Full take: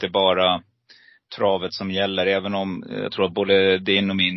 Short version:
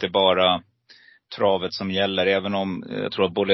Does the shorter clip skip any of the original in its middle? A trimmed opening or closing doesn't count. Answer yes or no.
no